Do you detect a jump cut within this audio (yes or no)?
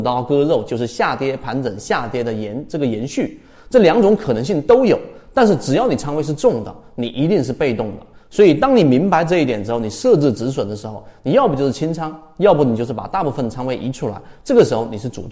no